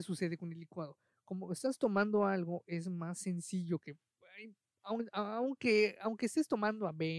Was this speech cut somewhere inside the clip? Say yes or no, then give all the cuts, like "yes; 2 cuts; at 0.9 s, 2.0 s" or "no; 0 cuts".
no; 0 cuts